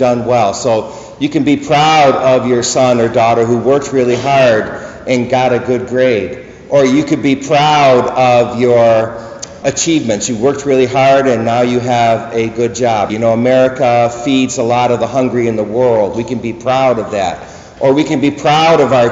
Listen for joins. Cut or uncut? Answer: cut